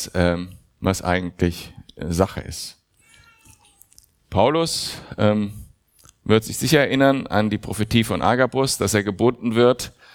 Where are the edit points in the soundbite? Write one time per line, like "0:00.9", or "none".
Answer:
none